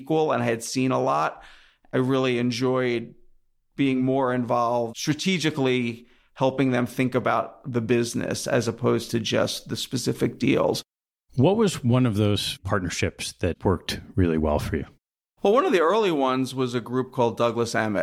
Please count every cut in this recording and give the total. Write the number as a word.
zero